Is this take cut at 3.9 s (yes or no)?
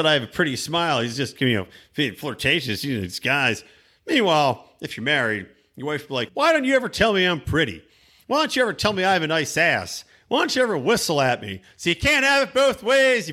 no